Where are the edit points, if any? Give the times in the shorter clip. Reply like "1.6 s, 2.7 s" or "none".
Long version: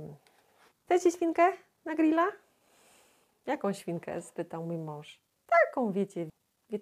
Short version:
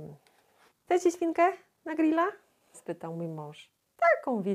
2.7 s